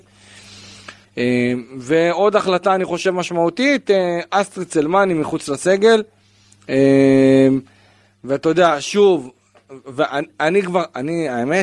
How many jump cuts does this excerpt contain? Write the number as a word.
one